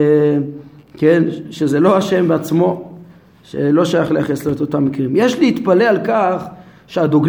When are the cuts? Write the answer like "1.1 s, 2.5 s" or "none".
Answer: none